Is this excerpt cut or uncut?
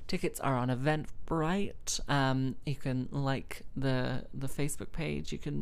uncut